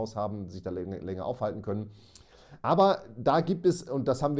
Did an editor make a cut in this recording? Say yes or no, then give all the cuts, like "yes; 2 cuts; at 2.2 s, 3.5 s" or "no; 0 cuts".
no; 0 cuts